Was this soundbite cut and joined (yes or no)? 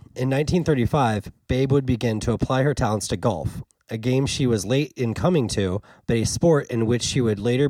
no